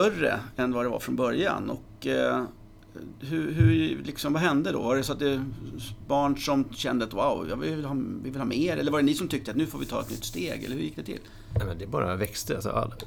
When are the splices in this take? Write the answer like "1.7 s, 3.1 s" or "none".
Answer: none